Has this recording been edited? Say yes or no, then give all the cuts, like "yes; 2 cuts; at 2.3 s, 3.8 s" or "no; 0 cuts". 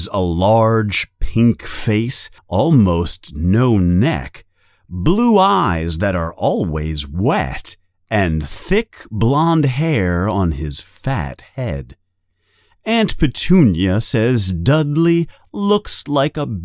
yes; 1 cut; at 2.4 s